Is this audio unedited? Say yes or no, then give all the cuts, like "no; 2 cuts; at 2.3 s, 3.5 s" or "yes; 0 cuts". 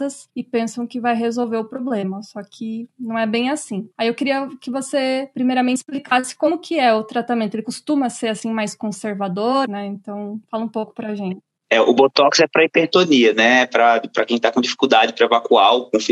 no; 2 cuts; at 3.9 s, 9.6 s